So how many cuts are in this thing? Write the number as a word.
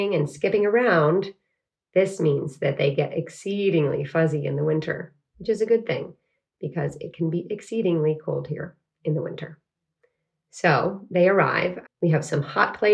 two